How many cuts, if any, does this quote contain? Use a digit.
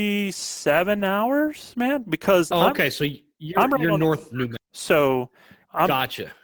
1